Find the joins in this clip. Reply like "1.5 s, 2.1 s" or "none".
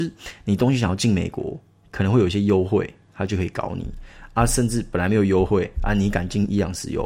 none